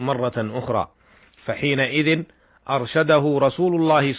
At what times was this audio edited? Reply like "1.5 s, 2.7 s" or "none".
none